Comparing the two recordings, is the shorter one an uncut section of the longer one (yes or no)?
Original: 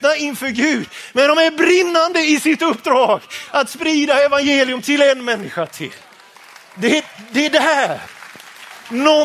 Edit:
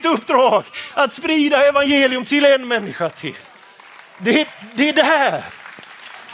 yes